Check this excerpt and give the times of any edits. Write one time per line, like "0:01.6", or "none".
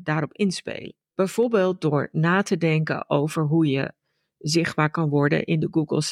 0:01.0